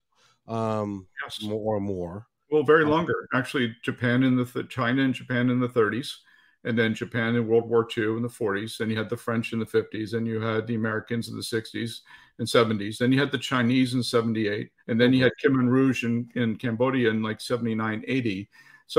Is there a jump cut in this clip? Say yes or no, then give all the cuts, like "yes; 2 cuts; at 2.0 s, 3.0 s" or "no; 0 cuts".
yes; 1 cut; at 14.8 s